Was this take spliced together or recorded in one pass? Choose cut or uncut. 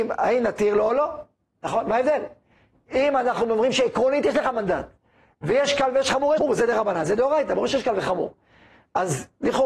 cut